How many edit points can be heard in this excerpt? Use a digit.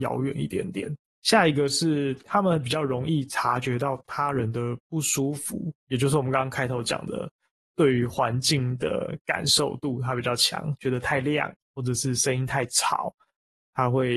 2